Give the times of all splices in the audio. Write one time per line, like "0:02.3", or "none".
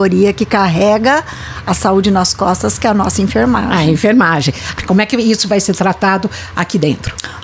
0:04.8

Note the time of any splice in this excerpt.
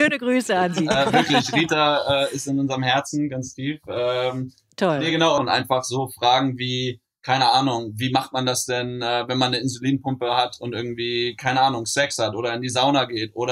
0:05.4

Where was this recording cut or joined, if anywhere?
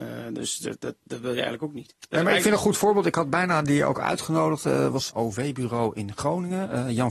0:01.0
0:05.1

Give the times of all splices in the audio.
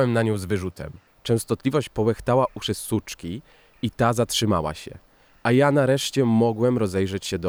0:01.1

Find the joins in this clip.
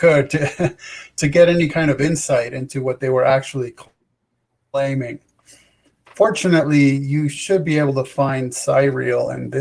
none

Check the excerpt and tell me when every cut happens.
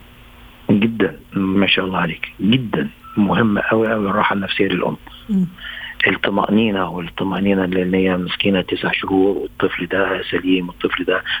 0:01.2

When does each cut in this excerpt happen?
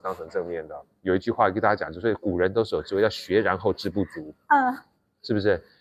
0:01.0

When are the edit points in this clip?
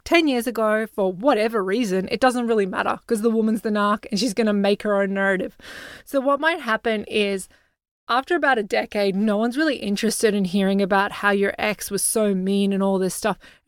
none

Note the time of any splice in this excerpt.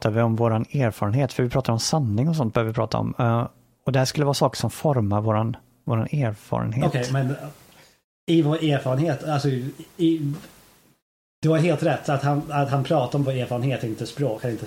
none

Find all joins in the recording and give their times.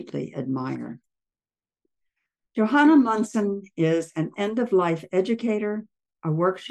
none

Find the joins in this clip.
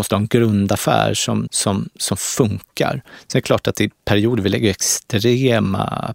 0:01.5

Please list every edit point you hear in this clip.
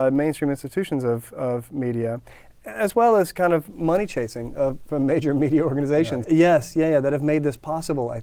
0:06.2

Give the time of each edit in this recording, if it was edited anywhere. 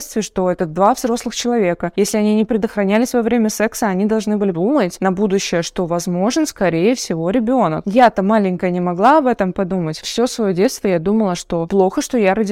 none

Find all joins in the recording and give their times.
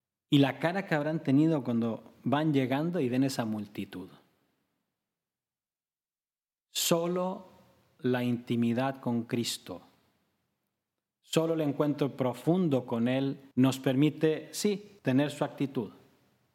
0:13.5
0:15.0

